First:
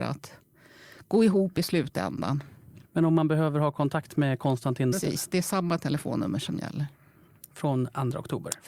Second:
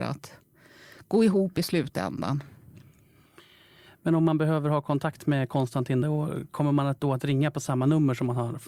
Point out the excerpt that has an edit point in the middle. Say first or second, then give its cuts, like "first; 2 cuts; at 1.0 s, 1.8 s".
first; 2 cuts; at 2.8 s, 4.9 s